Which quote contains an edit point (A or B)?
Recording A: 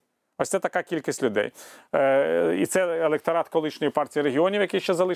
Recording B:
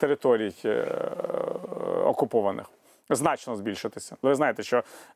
B